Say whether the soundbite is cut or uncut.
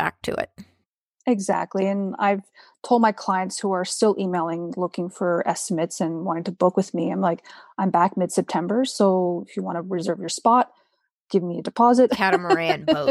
cut